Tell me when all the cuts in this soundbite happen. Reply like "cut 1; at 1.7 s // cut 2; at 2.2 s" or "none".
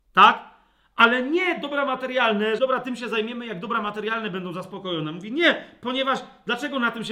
cut 1; at 2.6 s